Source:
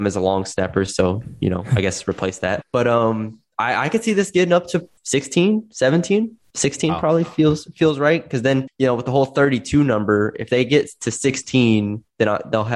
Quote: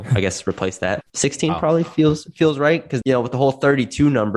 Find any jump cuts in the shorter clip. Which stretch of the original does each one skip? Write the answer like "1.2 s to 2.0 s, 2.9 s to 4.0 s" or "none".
2.7 s to 6.5 s, 8.4 s to 8.8 s